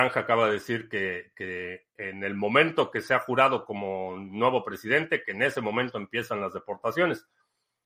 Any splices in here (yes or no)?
no